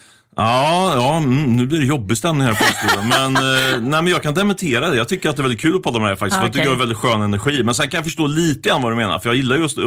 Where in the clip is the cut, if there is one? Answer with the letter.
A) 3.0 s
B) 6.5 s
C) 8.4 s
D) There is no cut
D